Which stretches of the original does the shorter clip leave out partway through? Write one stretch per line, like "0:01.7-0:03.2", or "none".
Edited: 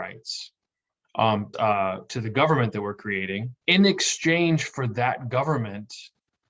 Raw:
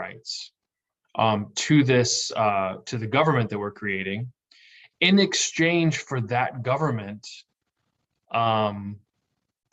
0:01.5-0:02.3
0:04.4-0:04.9

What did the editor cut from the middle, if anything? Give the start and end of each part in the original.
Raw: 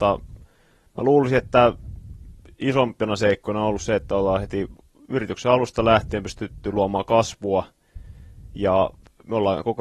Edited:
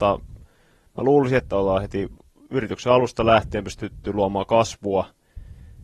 0:01.4-0:04.0

